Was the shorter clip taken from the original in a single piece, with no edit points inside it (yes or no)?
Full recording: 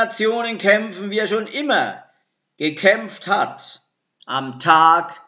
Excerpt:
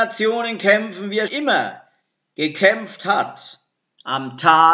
no